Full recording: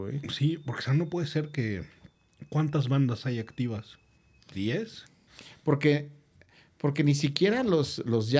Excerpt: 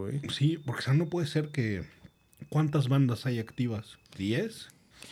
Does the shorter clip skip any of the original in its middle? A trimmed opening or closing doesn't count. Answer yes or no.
yes